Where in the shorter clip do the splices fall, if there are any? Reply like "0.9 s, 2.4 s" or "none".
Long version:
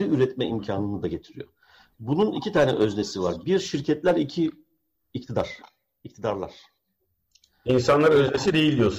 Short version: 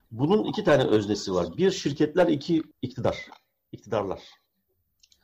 2.7 s